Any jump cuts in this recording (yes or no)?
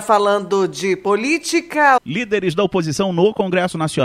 yes